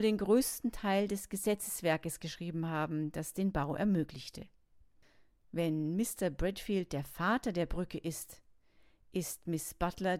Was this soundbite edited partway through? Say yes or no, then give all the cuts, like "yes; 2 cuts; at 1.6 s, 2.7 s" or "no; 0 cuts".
no; 0 cuts